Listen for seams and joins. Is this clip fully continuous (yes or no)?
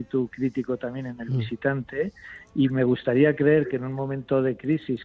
yes